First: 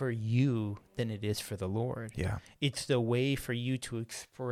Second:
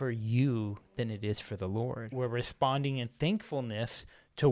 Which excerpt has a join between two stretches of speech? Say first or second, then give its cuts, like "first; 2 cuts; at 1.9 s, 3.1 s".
second; 1 cut; at 2.1 s